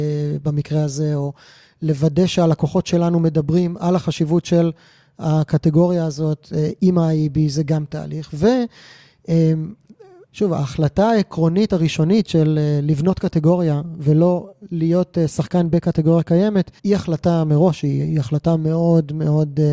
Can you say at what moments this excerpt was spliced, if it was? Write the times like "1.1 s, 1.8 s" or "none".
16.8 s

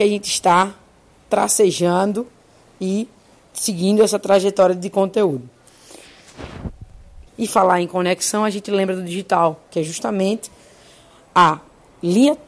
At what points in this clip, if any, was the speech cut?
7.3 s

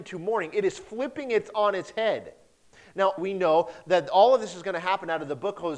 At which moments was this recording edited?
3.2 s

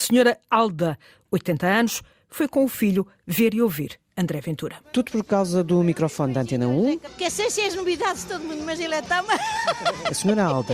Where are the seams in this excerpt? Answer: 4.8 s

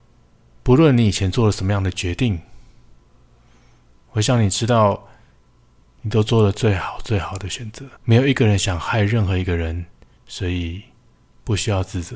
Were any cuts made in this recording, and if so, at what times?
8.0 s, 10.2 s

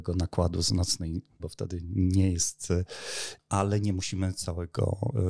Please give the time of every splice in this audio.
1.4 s, 3.4 s

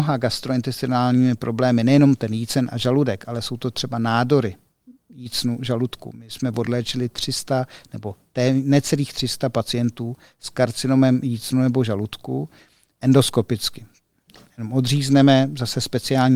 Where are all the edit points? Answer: none

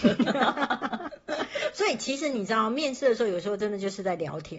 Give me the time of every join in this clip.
none

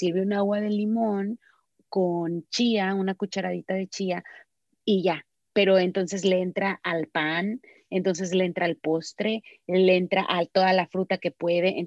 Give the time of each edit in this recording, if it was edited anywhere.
none

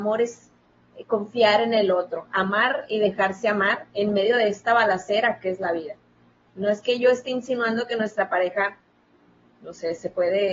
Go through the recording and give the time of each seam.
9.5 s

